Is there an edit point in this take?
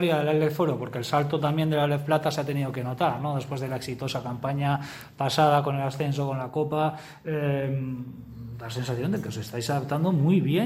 no; 0 cuts

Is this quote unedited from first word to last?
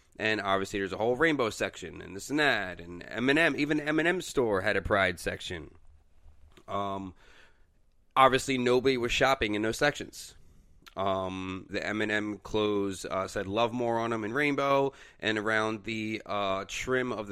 no; 1 cut; at 11.7 s

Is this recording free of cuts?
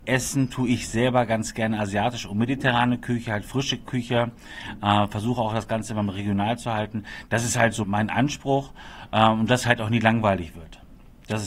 no; 1 cut; at 7.8 s

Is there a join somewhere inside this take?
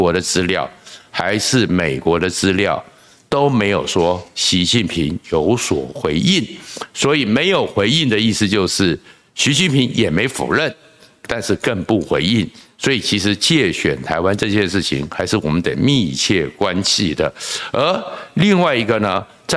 no; 0 cuts

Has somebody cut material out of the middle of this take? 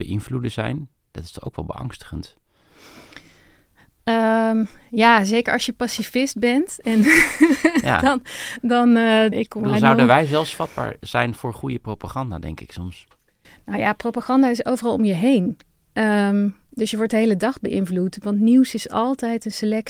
yes; 1 cut; at 9.3 s

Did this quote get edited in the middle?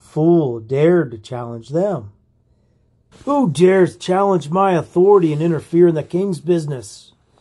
yes; 1 cut; at 3.1 s

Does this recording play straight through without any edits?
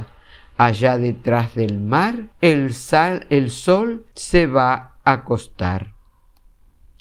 no; 2 cuts; at 2.3 s, 4.1 s

